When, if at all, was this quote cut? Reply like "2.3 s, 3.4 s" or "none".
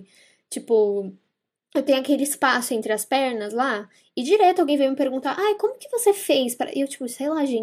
none